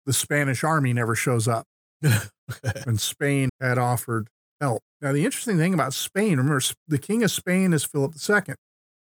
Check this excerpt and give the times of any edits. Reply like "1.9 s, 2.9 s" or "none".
3.5 s, 4.9 s